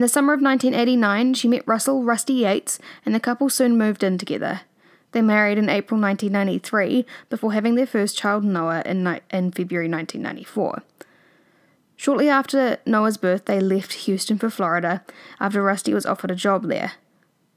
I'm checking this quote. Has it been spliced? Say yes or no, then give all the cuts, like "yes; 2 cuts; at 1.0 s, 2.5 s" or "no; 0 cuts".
no; 0 cuts